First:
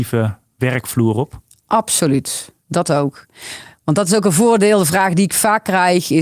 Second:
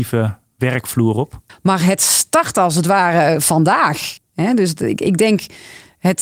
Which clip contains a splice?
second; 2 cuts; at 1.5 s, 4.3 s

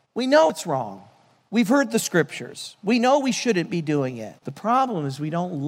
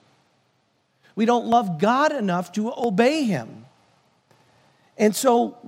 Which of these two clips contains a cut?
first; 1 cut; at 4.4 s

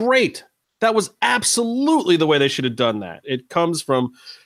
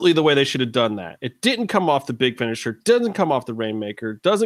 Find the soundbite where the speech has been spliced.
first; 1 cut; at 3.2 s

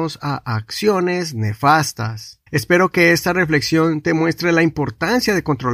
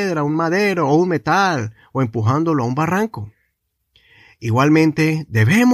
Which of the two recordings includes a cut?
first; 1 cut; at 2.5 s

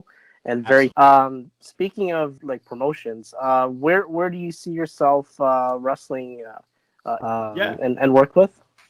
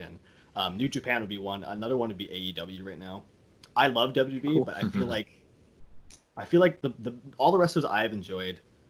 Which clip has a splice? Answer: first; 3 cuts; at 0.9 s, 2.4 s, 7.2 s

